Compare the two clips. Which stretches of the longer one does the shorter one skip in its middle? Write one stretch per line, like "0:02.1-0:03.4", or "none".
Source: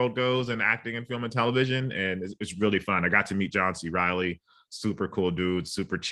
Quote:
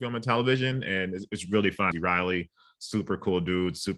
0:03.0-0:03.8